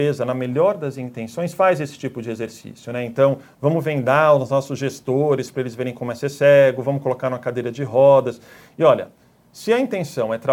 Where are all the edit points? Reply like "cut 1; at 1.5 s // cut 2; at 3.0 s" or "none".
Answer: none